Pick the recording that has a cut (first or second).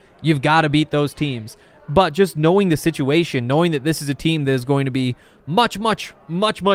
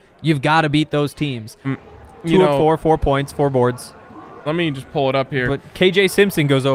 second